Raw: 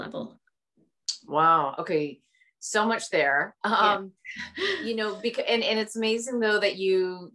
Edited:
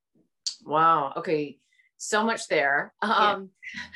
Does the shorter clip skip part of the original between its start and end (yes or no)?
no